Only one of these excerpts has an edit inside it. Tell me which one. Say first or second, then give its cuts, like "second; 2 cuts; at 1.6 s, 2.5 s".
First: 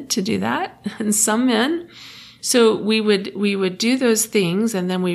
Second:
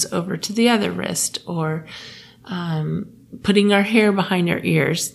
first; 1 cut; at 2.4 s